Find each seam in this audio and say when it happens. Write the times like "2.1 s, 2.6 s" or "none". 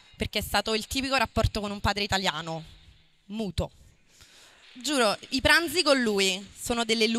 4.6 s